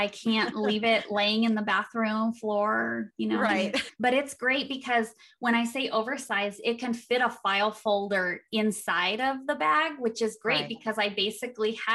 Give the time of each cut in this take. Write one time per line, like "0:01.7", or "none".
0:03.9